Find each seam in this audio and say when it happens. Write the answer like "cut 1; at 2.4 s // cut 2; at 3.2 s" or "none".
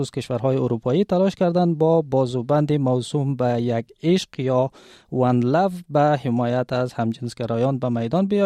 none